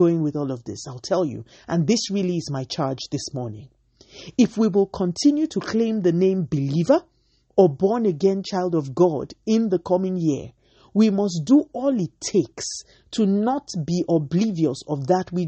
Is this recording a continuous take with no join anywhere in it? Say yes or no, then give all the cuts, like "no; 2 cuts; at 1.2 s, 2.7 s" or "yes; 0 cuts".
yes; 0 cuts